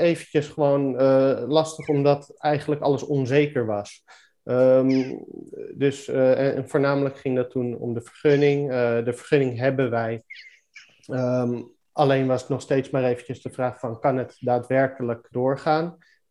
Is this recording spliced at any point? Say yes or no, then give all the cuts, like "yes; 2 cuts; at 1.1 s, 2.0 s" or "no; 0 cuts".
yes; 1 cut; at 15.3 s